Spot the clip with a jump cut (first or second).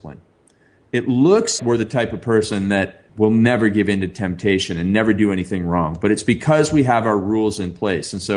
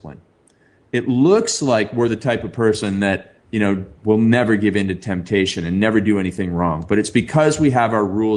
first